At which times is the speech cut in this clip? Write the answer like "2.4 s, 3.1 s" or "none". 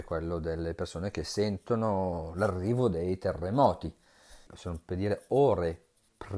4.5 s